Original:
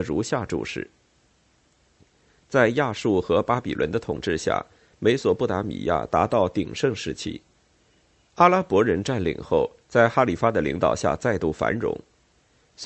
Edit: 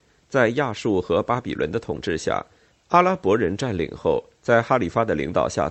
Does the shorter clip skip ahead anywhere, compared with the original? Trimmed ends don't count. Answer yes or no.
yes